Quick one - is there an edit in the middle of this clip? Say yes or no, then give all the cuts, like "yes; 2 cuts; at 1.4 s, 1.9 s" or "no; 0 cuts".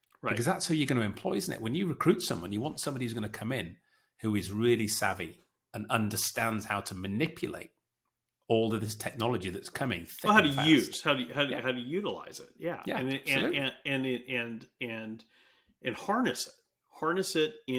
no; 0 cuts